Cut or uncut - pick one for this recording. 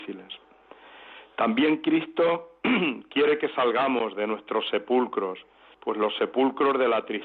cut